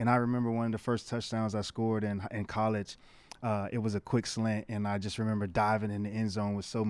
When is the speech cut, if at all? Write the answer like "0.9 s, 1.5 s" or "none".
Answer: none